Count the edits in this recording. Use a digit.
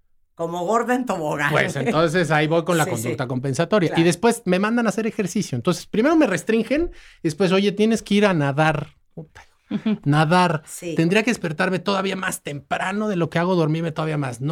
0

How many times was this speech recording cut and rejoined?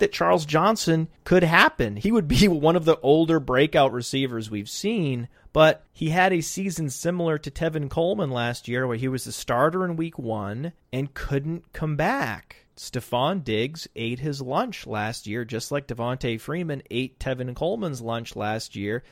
1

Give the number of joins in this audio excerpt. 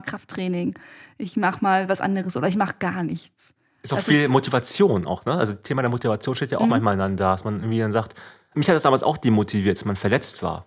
0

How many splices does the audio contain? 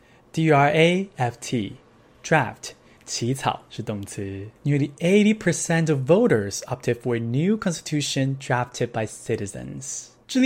1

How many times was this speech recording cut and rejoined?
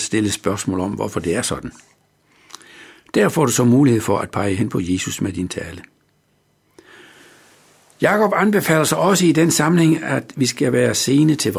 0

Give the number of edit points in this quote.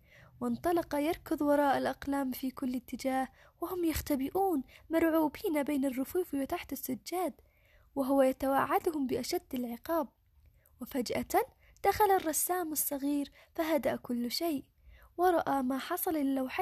0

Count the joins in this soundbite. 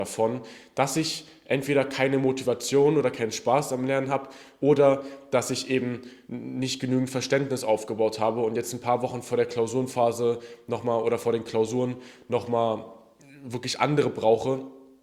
0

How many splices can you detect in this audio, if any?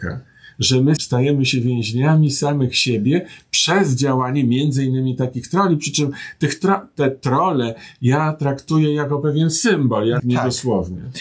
2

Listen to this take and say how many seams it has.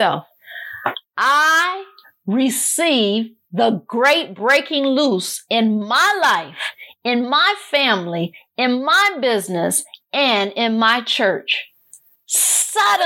1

